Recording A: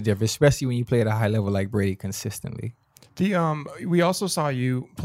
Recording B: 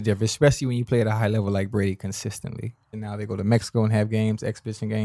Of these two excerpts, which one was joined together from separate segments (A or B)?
B